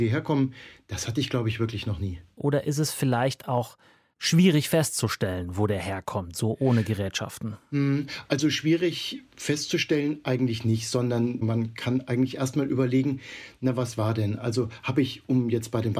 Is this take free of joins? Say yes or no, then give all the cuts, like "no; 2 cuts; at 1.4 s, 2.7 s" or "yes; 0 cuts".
no; 1 cut; at 2.4 s